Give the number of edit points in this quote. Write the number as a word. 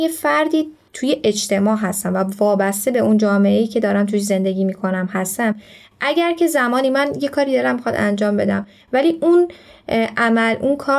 zero